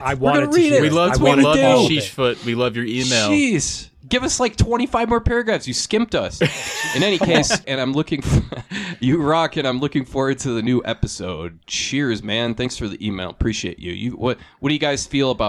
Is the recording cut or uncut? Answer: cut